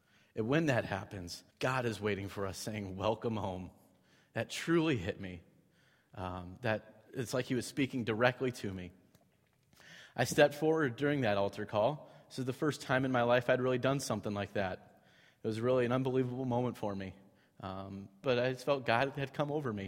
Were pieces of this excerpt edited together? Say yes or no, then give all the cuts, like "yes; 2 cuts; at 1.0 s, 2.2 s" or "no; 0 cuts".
yes; 3 cuts; at 1.5 s, 7.1 s, 18.2 s